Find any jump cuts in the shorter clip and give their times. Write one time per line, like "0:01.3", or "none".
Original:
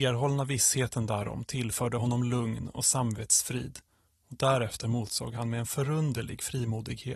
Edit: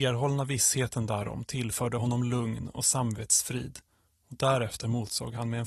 none